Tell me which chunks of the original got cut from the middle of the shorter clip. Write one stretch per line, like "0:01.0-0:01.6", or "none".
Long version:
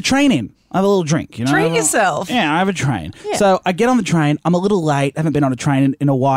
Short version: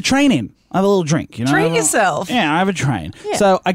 none